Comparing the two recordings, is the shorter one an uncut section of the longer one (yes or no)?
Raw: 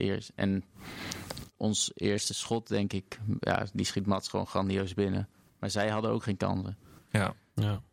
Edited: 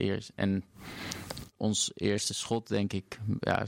yes